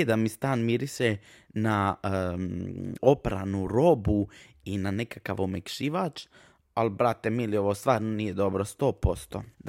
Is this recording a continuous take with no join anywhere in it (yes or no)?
no